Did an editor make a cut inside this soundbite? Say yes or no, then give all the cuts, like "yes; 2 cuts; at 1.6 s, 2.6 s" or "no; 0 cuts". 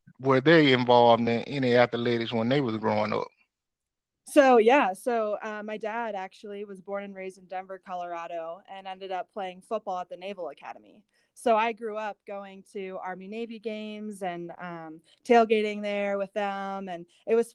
no; 0 cuts